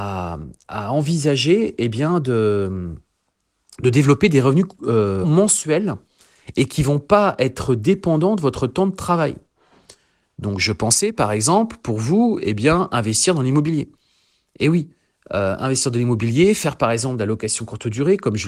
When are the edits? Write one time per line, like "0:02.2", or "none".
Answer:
0:05.2